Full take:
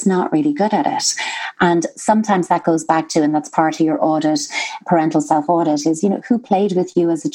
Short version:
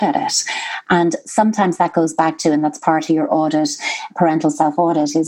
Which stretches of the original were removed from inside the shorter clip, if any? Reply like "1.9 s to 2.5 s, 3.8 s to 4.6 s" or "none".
none

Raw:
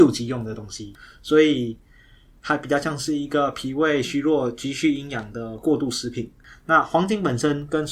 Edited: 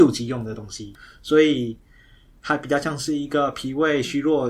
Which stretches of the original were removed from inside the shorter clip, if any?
none

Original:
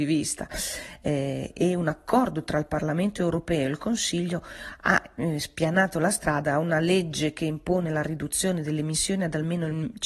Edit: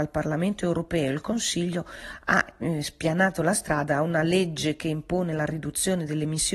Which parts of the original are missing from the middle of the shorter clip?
none

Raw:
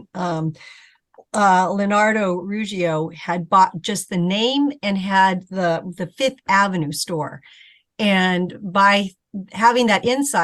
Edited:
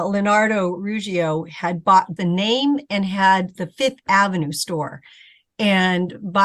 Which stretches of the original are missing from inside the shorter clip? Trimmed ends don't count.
3.8 s to 4.1 s, 5.5 s to 6.0 s

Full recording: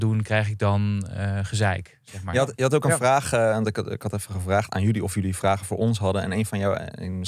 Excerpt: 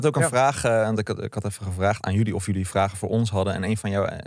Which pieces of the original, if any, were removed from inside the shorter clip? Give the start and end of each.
none

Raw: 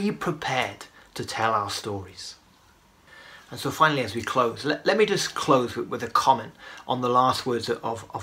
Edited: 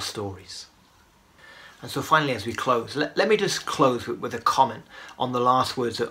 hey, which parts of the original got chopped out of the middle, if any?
none

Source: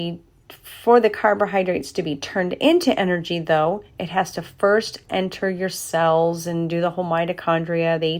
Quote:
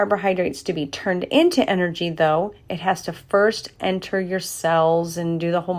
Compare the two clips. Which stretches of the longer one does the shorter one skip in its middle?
none

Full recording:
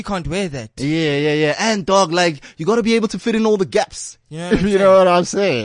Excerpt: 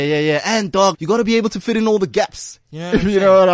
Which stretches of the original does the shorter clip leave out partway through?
2.1 s to 2.5 s

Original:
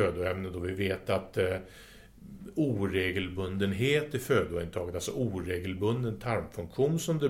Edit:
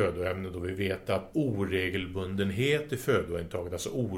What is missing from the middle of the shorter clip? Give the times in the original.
1.3 s to 2.5 s

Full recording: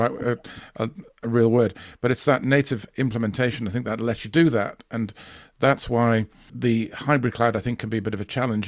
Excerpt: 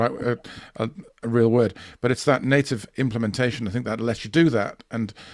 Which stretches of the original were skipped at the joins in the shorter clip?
none

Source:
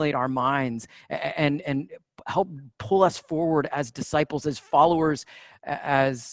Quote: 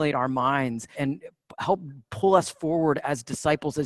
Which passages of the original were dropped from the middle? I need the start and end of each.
0.9 s to 1.6 s

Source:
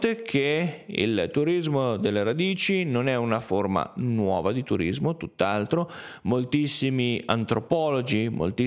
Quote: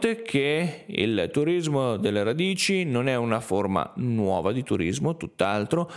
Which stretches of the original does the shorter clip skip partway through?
none

